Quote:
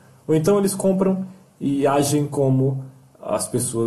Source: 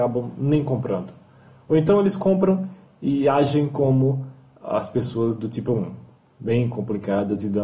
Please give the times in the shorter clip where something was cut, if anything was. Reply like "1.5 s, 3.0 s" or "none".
none

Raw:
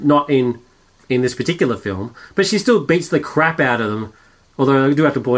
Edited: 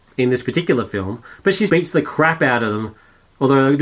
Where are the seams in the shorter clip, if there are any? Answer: 1.7 s

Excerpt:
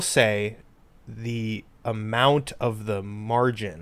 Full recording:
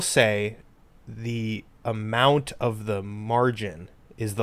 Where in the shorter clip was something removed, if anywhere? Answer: none

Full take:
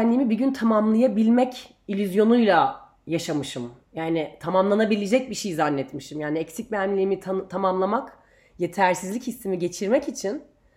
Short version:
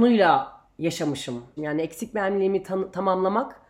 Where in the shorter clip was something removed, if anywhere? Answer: 1.6 s

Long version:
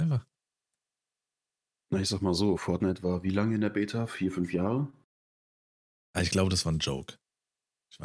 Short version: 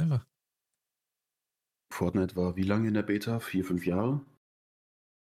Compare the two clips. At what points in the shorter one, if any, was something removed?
1.9 s

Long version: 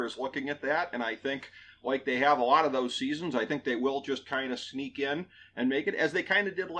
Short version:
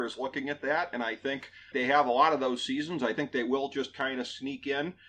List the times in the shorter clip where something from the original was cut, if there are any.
1.7 s

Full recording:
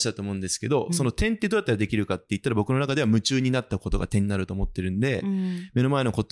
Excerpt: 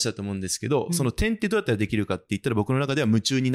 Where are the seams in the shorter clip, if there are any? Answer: none

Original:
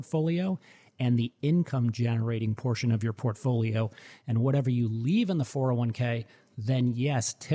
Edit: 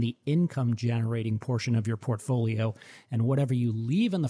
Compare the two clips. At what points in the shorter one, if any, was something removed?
none

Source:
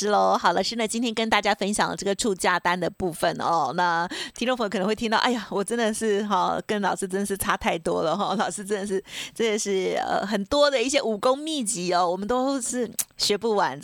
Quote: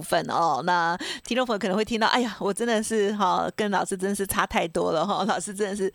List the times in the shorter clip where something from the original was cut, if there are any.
none

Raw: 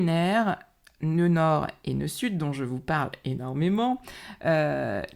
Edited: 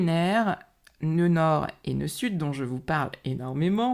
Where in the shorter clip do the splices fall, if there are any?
none

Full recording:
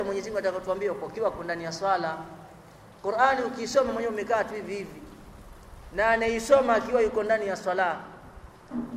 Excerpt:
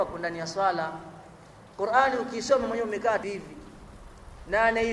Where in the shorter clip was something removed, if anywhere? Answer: 3.2 s

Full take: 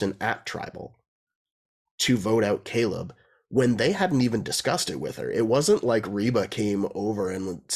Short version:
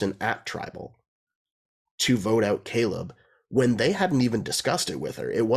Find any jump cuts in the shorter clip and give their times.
none

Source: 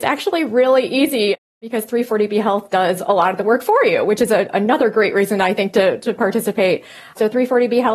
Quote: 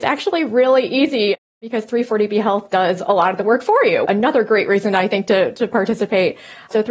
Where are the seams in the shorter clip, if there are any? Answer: 4.1 s

